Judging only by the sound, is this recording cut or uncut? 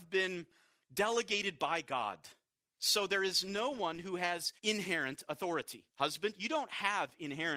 cut